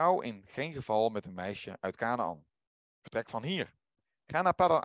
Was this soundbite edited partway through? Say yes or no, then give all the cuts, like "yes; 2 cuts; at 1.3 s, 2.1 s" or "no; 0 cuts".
no; 0 cuts